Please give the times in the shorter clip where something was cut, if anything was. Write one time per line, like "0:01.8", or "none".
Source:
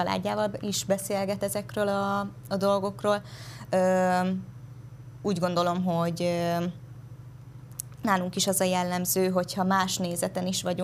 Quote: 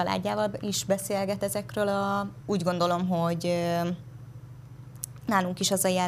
0:02.4